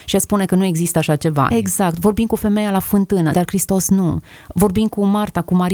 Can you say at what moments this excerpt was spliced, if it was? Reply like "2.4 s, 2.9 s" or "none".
1.5 s, 3.3 s